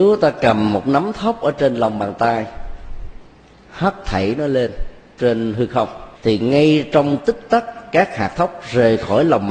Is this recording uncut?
no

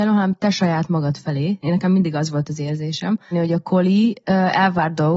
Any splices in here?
yes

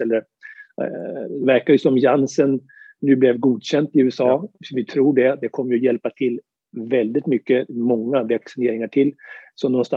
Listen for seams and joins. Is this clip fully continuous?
yes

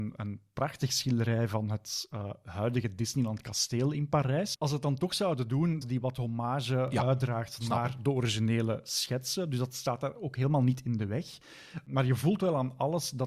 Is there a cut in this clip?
yes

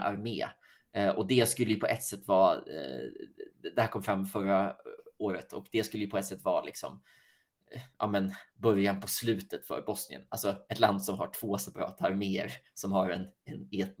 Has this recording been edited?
no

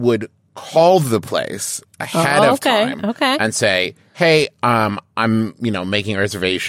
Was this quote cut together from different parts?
no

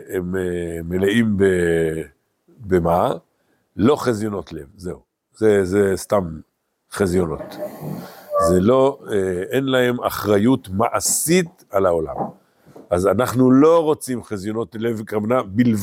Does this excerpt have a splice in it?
no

